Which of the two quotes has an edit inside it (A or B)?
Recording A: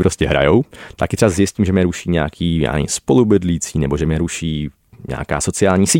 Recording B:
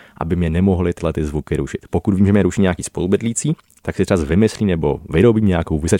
A